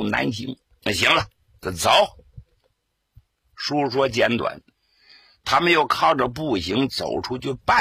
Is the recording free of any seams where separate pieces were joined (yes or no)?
yes